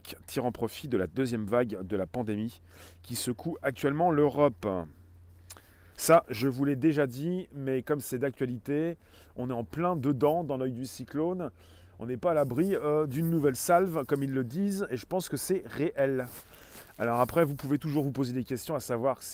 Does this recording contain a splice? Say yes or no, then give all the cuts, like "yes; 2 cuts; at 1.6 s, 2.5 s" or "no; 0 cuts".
yes; 1 cut; at 5.9 s